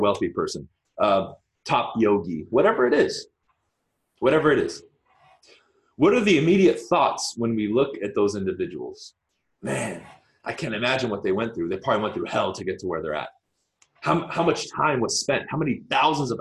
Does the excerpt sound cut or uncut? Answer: uncut